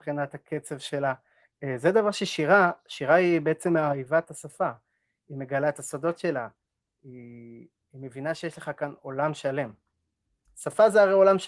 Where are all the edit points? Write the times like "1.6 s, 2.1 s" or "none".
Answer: none